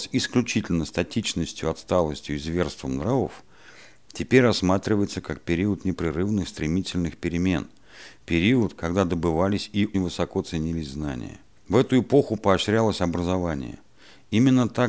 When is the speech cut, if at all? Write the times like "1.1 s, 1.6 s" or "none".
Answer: 9.9 s, 11.6 s